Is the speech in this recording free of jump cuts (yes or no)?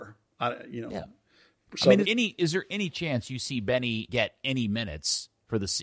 no